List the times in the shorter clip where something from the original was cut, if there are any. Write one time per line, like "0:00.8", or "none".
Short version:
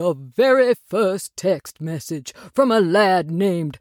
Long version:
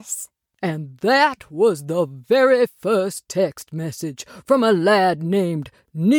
none